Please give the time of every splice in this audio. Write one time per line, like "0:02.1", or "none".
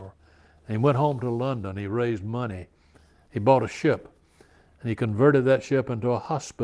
none